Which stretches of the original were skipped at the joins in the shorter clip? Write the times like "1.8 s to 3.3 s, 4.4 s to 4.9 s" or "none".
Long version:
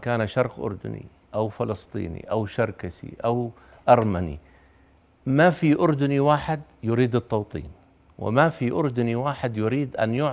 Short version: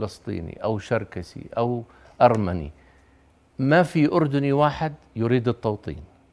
none

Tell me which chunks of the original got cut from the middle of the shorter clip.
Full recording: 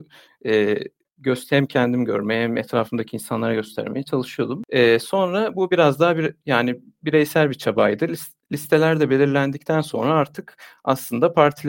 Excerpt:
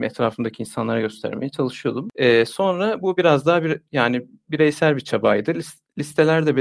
none

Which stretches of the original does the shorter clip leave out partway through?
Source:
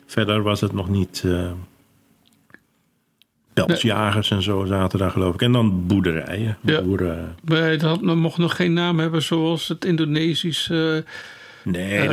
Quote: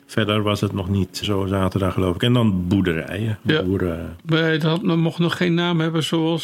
1.2 s to 4.4 s

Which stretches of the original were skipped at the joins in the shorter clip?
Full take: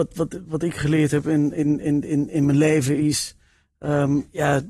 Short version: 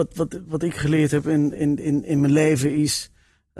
1.5 s to 1.8 s

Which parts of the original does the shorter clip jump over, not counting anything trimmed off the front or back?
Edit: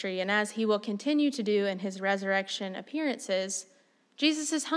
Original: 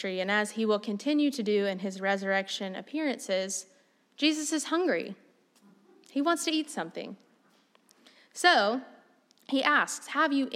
none

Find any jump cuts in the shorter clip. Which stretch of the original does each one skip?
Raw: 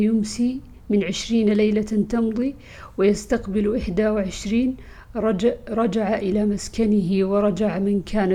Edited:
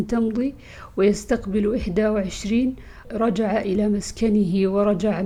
5.1 s to 5.6 s

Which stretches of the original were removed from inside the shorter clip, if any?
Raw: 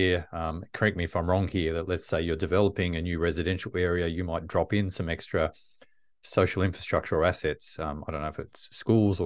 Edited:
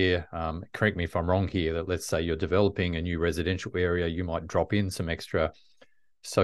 none

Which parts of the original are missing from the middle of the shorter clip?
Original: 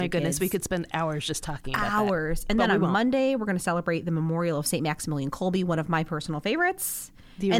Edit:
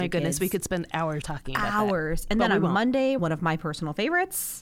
1.2 s to 1.4 s, 3.4 s to 5.7 s

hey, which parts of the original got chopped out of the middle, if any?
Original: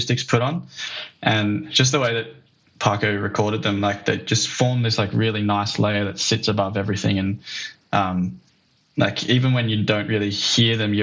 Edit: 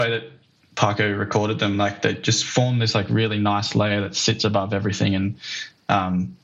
none

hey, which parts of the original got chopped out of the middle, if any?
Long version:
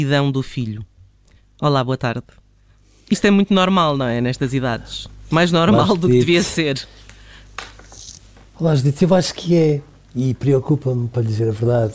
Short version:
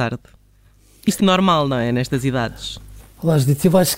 3.2 s to 3.5 s, 5.3 s to 8.4 s

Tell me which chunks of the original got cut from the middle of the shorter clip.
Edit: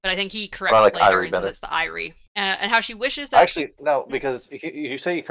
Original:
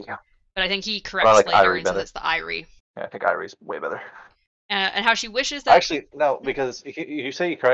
2.8 s to 4.6 s

